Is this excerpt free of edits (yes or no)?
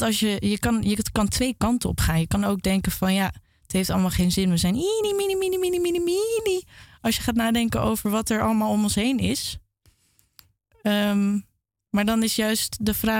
yes